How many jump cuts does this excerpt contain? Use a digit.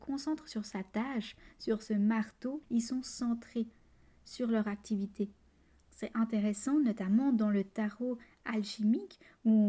1